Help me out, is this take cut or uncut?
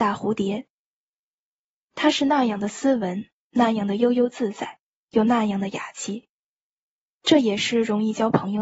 uncut